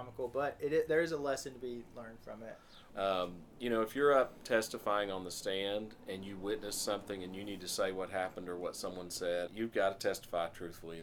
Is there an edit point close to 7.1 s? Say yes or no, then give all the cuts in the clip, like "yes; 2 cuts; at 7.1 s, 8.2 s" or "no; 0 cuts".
no; 2 cuts; at 2.9 s, 9.5 s